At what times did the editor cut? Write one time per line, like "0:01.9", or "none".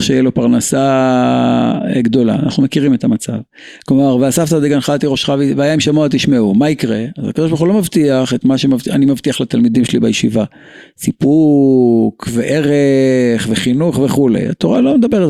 0:03.8

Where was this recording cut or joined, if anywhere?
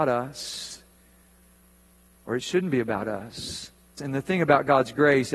0:04.0

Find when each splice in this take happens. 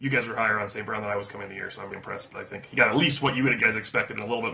0:01.9

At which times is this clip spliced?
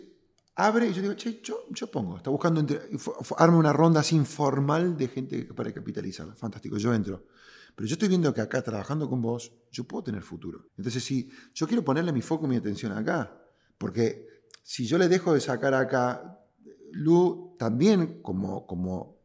0:10.7

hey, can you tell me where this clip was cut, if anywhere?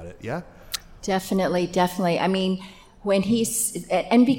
none

